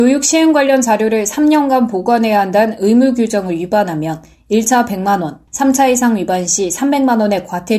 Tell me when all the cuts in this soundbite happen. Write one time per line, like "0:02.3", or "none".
0:05.5